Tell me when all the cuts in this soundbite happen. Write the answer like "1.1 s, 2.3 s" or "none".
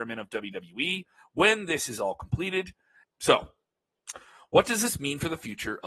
3.0 s